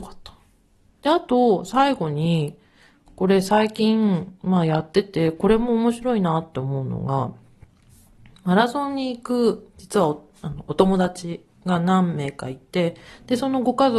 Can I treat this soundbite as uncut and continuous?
yes; 0 cuts

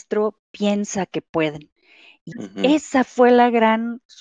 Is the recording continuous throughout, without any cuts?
no; 1 cut; at 2.3 s

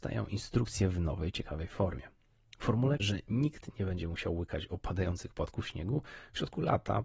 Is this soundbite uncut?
no; 1 cut; at 3.0 s

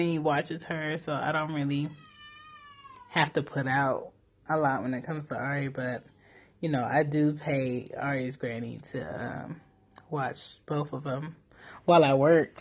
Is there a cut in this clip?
no; 0 cuts

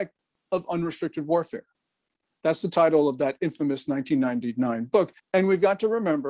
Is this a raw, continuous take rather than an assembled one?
no; 1 cut; at 5.2 s

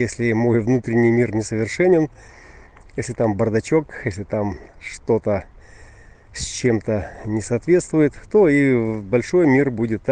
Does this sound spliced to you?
no; 0 cuts

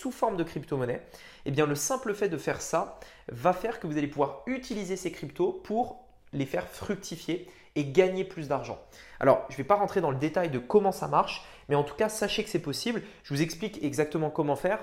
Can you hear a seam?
no; 0 cuts

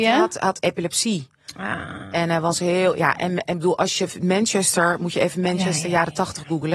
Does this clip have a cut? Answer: no; 0 cuts

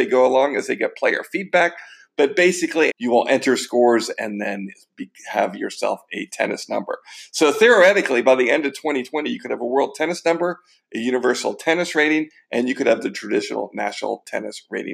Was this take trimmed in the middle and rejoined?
yes; 1 cut; at 2.9 s

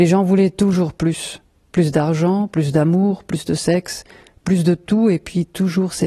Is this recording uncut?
yes; 0 cuts

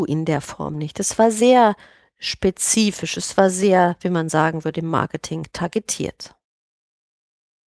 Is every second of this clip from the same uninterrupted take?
yes; 0 cuts

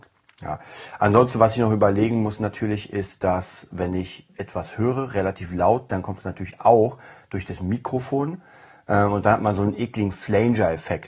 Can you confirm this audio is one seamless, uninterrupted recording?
yes; 0 cuts

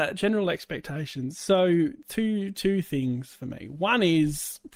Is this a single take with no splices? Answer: yes; 0 cuts

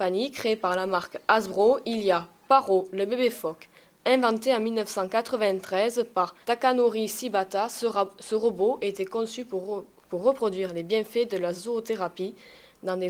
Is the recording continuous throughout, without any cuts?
no; 1 cut; at 6.4 s

